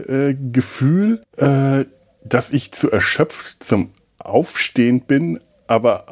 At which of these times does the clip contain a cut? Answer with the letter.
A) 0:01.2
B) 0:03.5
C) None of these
A